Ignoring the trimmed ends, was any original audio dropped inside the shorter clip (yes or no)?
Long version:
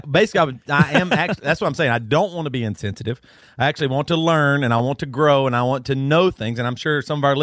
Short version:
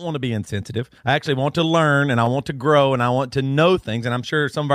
yes